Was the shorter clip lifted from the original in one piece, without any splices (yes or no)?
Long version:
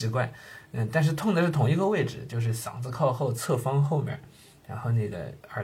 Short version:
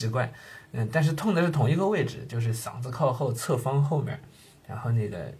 yes